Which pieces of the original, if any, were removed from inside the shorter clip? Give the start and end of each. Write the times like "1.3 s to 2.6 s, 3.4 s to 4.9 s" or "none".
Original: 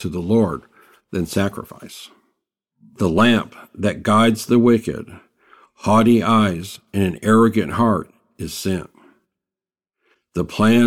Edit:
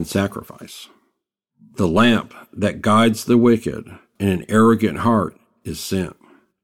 5.4 s to 6.9 s